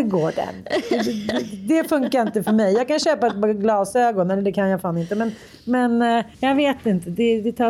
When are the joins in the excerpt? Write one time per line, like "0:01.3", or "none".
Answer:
0:06.3